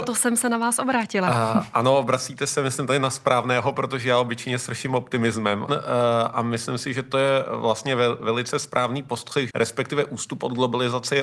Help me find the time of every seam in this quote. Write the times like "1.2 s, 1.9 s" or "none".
5.7 s, 9.5 s

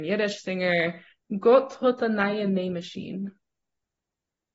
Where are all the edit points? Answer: 1.2 s

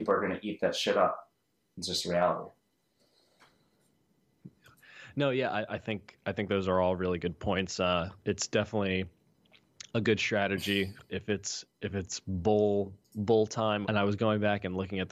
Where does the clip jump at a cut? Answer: 11.1 s, 13.8 s

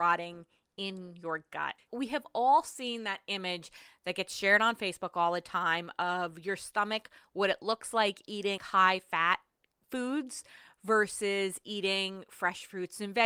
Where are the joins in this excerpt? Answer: 1.9 s, 8.6 s

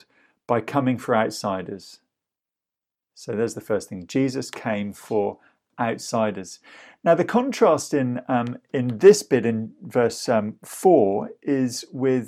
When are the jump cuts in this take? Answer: none

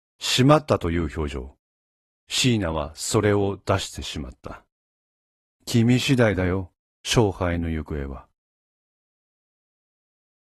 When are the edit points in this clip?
5.5 s

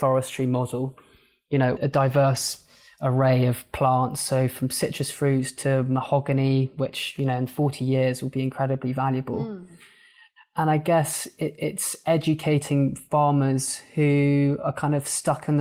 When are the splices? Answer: 1.8 s

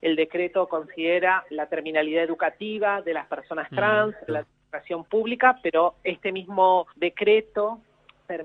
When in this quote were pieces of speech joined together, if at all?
1.5 s, 4.3 s, 6.9 s

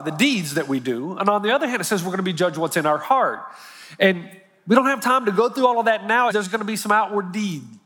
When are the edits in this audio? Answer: 6.3 s

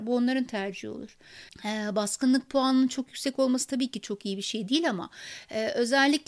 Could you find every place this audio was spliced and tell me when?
1.5 s

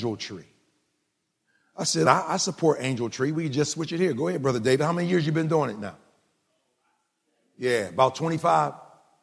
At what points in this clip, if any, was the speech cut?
2.0 s

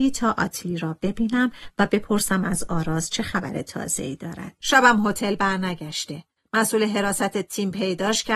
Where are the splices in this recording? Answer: 4.6 s

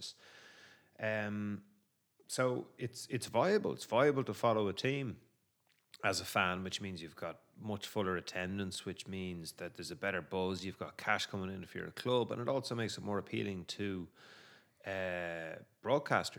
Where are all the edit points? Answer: none

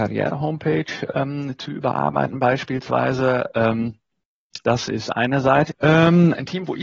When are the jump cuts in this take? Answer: 4.6 s, 5.7 s

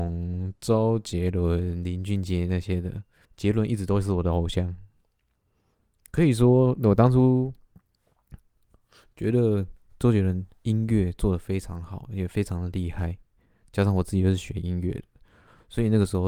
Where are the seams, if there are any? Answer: 3.2 s

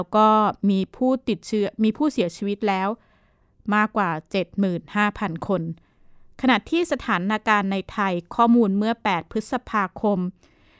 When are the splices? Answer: none

